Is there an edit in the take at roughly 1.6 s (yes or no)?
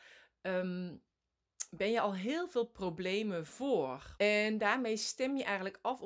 no